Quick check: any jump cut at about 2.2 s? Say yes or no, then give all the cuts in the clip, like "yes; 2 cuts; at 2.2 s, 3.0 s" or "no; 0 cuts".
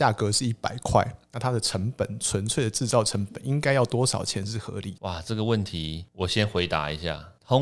no; 0 cuts